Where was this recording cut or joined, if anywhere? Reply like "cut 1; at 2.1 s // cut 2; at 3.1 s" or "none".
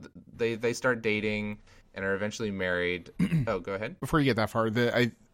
cut 1; at 3.2 s